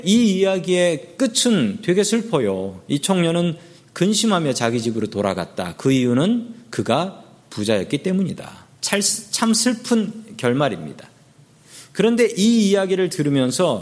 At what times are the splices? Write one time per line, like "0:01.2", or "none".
0:08.7